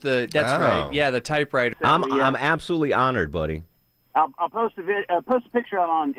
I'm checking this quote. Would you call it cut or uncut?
cut